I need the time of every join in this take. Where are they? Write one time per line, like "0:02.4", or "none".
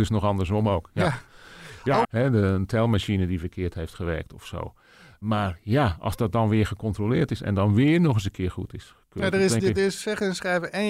0:02.0

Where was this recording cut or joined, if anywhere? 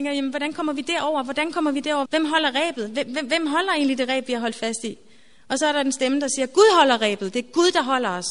0:02.0

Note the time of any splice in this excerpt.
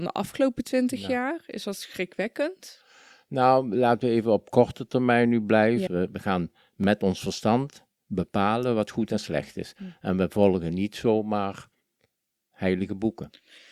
0:05.9

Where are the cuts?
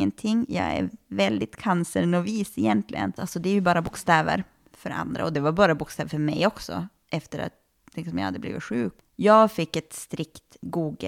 0:03.2

